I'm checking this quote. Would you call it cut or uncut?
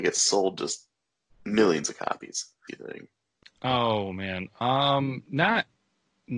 cut